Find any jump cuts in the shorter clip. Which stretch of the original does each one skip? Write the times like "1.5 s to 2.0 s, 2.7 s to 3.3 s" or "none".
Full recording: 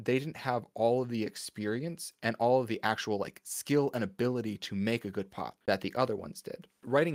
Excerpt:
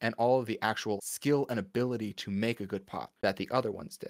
3.2 s to 3.4 s